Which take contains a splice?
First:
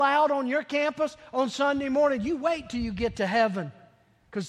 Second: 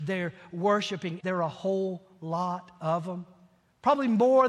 second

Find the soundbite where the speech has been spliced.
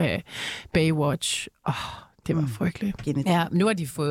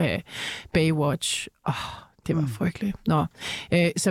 first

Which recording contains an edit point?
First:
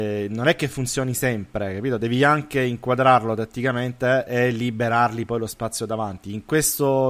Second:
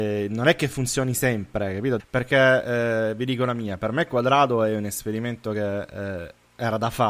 second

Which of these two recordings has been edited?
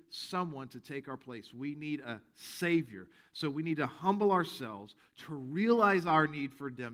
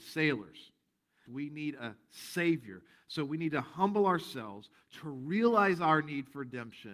second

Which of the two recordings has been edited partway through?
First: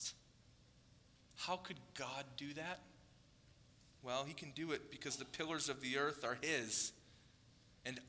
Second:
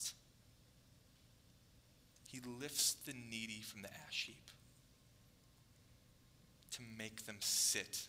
first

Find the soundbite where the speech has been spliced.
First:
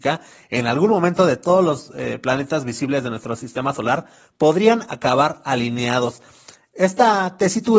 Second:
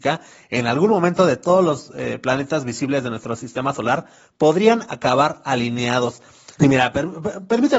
second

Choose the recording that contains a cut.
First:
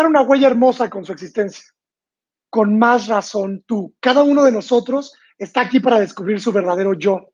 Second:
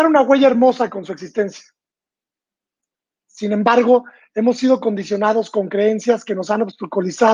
first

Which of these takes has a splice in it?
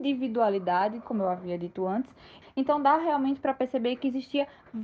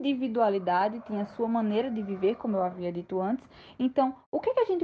first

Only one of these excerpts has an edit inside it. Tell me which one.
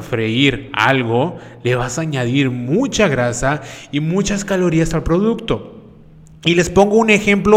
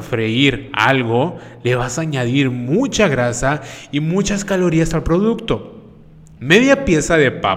second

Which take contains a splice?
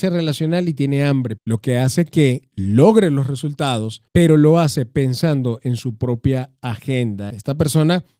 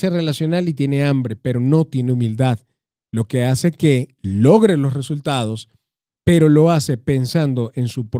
first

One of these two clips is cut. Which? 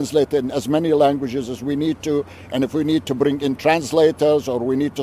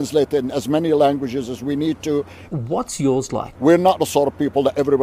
second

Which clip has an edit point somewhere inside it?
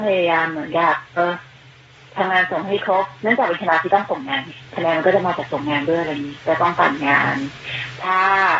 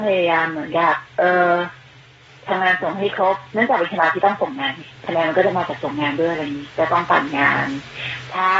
first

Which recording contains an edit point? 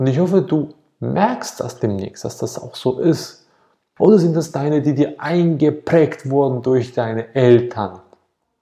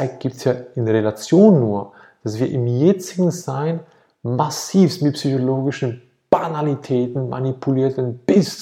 first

